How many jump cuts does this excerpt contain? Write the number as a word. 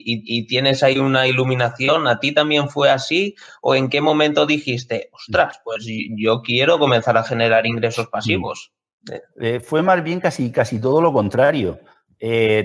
one